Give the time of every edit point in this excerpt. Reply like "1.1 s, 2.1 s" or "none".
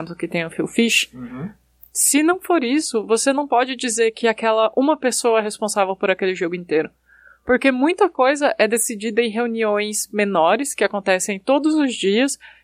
none